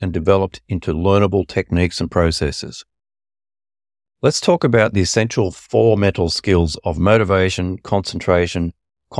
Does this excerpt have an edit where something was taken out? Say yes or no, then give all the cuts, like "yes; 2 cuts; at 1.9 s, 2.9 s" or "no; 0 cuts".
no; 0 cuts